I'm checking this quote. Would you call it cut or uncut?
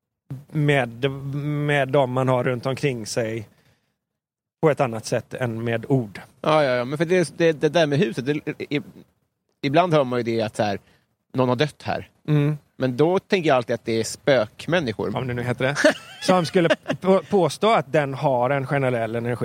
cut